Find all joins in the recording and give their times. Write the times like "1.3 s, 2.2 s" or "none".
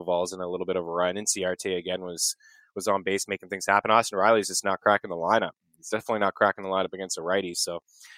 none